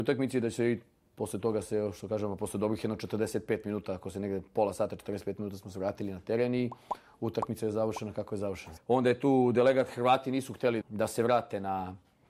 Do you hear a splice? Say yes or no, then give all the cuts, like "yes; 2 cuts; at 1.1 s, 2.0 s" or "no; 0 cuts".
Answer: yes; 2 cuts; at 8.8 s, 10.8 s